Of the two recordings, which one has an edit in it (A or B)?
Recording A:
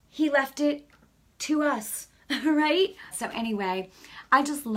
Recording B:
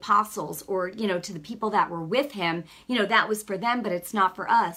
A